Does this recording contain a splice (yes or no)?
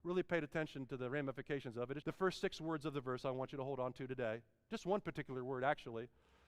yes